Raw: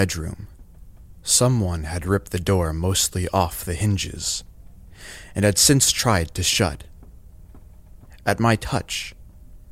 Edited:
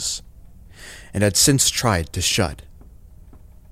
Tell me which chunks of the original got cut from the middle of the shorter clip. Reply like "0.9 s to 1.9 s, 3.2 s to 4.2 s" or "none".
none